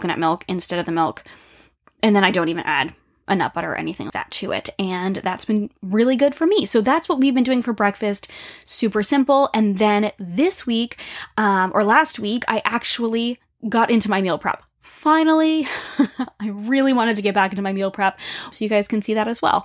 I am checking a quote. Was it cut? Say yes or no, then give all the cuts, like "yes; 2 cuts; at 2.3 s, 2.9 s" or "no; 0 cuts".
yes; 2 cuts; at 4.1 s, 18.5 s